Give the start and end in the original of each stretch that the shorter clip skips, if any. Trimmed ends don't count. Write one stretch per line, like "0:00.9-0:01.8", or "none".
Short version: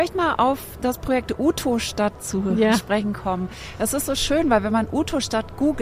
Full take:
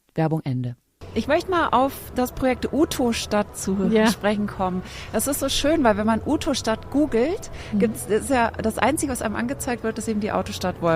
none